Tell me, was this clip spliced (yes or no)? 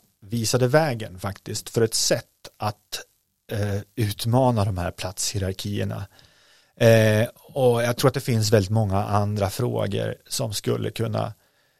no